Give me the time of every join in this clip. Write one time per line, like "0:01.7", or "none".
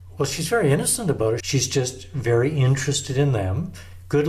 0:01.4

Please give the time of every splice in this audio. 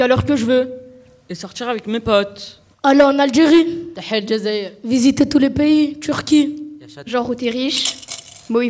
0:02.7
0:07.0

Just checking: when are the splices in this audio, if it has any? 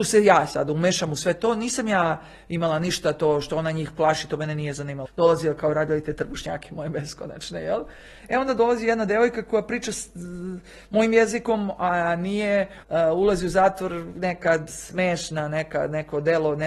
0:05.1
0:12.8

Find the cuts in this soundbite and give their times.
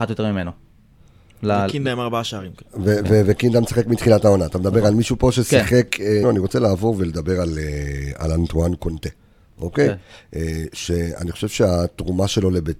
0:06.2

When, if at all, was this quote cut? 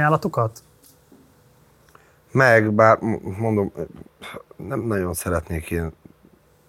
none

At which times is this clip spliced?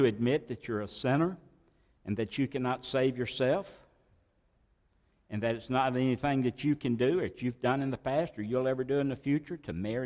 none

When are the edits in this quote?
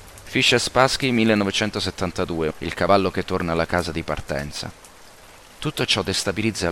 0:02.5

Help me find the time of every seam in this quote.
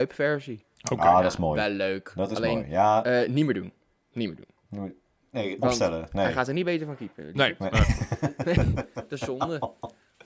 none

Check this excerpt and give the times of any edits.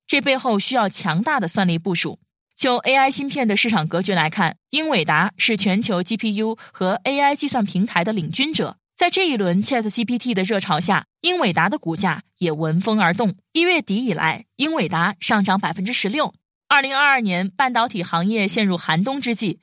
none

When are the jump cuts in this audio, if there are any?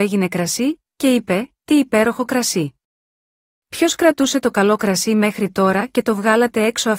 none

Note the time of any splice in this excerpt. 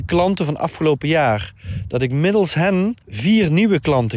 0:03.0

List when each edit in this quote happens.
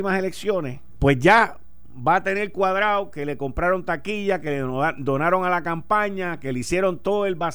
0:00.9

